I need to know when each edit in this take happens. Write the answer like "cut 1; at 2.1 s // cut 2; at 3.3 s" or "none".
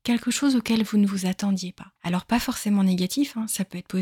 cut 1; at 2.0 s